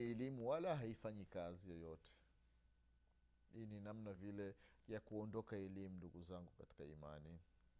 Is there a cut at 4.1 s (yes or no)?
yes